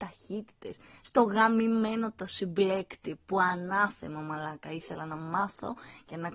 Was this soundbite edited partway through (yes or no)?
no